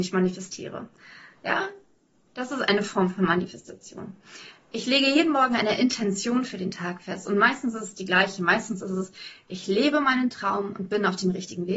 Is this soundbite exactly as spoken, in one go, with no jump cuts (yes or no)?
yes